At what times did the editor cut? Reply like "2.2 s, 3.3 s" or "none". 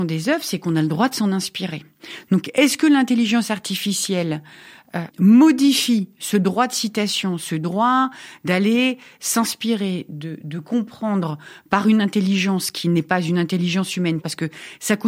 5.1 s